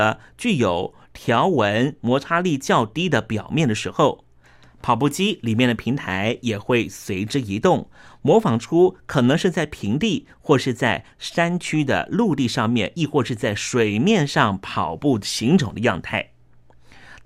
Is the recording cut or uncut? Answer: uncut